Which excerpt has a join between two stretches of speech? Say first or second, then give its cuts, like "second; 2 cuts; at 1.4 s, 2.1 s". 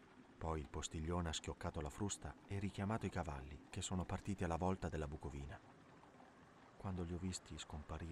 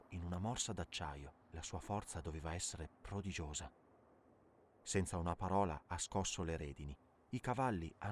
second; 1 cut; at 1.4 s